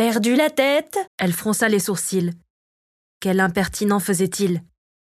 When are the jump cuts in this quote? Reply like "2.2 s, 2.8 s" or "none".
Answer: 1.1 s